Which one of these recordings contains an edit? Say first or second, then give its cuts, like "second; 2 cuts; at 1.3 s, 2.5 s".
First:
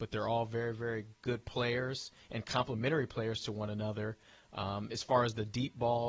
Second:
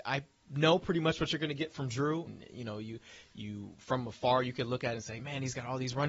second; 1 cut; at 2.3 s